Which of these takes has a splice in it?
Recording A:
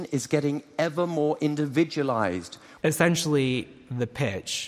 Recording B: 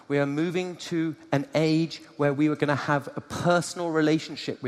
A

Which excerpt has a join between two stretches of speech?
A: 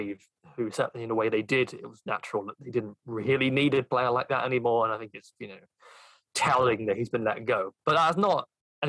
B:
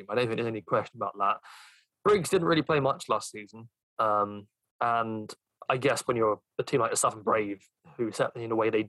B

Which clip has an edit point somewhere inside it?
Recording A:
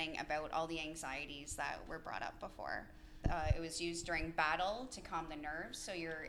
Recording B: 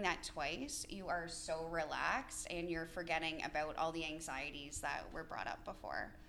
A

